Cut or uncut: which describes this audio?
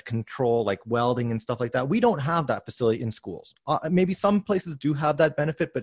uncut